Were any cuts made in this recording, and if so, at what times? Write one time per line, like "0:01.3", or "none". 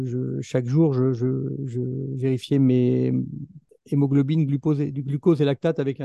none